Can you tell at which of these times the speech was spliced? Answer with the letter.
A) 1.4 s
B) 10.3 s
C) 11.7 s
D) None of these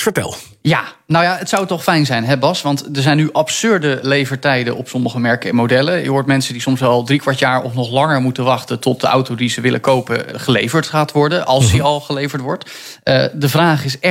B